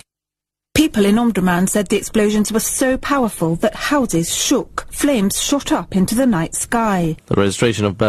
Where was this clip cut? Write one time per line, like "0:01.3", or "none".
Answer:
0:07.2